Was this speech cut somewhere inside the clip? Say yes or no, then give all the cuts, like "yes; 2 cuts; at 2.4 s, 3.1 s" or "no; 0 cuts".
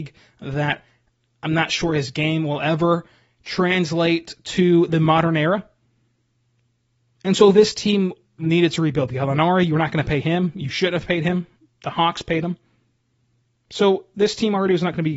no; 0 cuts